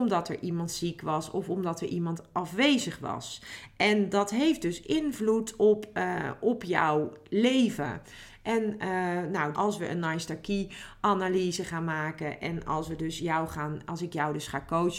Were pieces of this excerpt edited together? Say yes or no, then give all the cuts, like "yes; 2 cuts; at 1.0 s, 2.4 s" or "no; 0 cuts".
yes; 1 cut; at 9.5 s